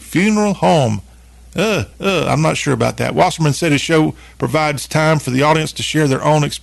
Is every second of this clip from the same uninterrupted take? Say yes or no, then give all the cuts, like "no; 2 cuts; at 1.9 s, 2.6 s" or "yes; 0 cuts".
yes; 0 cuts